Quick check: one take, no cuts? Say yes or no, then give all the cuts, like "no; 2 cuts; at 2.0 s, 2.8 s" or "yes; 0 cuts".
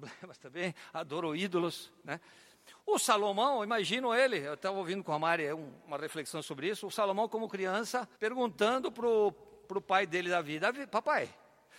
no; 1 cut; at 8.2 s